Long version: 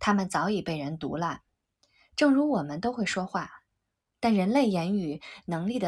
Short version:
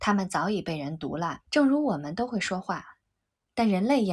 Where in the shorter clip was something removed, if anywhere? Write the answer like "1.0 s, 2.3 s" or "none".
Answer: 1.4 s